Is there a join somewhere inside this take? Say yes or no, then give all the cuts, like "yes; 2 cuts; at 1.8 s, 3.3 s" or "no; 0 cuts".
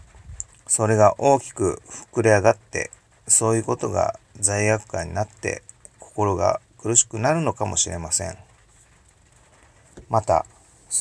no; 0 cuts